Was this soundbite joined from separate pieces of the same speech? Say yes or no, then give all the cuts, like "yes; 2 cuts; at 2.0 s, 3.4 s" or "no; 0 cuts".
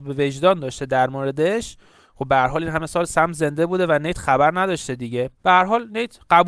no; 0 cuts